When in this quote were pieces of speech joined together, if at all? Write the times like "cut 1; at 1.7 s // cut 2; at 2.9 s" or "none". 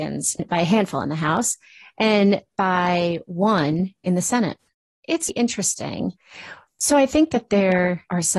cut 1; at 5.3 s // cut 2; at 6.7 s